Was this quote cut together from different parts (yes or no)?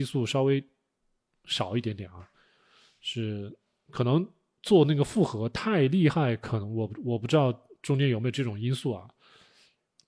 no